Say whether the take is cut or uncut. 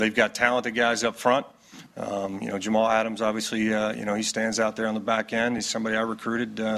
uncut